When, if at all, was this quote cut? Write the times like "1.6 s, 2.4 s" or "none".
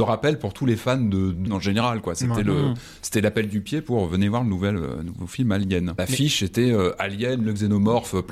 1.5 s, 6.0 s